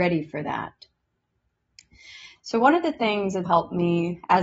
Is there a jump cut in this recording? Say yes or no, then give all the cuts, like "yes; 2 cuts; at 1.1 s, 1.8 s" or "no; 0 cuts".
yes; 2 cuts; at 2.4 s, 3.4 s